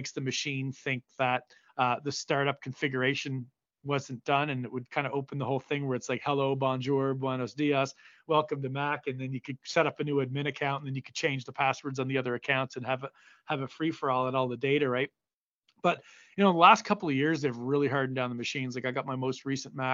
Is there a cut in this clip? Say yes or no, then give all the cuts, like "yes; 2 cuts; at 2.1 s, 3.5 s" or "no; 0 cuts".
no; 0 cuts